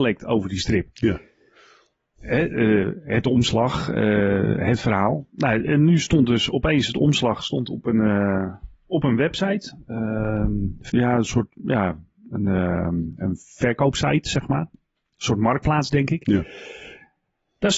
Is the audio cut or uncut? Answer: cut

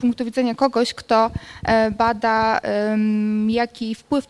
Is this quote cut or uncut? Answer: uncut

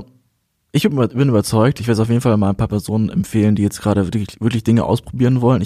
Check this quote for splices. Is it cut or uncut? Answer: uncut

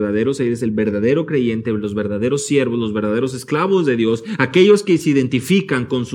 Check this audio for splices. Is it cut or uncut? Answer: uncut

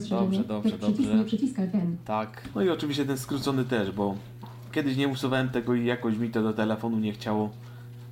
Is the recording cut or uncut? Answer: cut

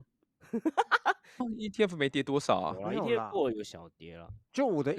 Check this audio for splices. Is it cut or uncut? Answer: cut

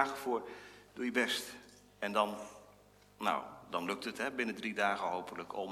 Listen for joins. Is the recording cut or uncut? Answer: uncut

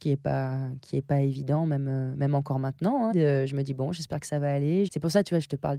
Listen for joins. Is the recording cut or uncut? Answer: cut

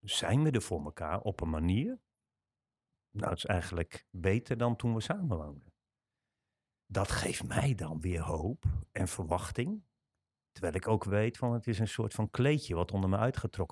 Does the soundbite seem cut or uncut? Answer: uncut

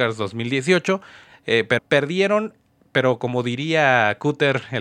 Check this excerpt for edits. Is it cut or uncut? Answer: cut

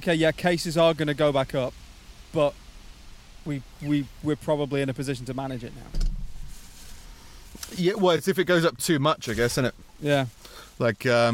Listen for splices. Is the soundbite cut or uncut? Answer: uncut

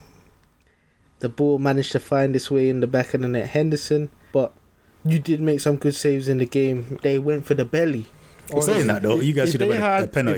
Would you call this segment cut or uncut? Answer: cut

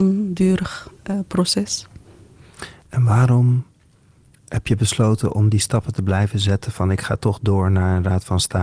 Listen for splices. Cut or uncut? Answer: uncut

